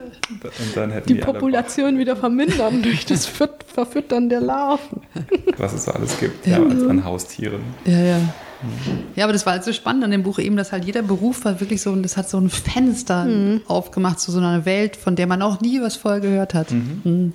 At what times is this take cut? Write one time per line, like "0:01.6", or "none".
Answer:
0:05.6